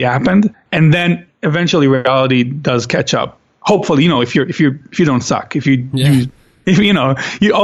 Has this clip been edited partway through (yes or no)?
no